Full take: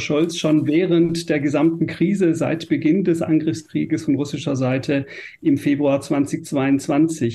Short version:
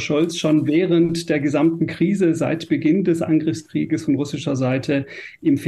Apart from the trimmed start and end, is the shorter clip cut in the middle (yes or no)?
no